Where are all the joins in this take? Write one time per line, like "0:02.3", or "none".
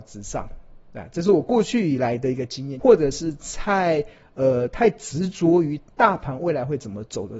0:02.8